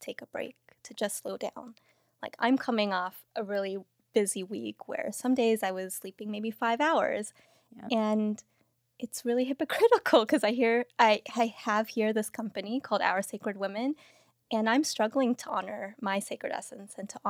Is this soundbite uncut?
yes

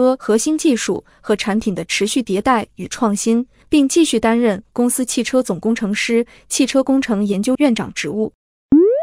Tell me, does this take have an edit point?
yes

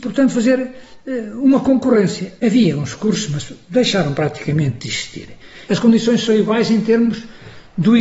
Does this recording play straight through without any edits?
no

